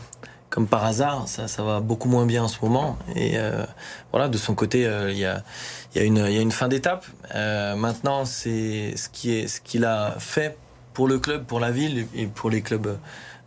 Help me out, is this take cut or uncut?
uncut